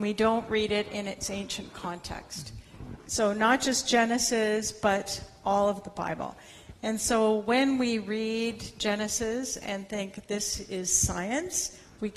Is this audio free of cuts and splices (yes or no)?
yes